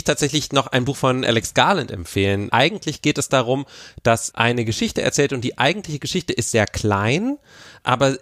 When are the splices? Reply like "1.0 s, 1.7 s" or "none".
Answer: 2.5 s, 4.3 s